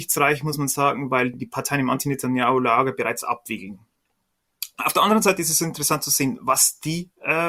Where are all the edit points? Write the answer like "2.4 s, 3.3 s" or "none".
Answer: none